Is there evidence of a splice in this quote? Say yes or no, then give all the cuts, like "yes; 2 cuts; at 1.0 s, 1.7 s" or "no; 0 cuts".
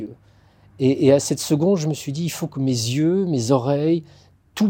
no; 0 cuts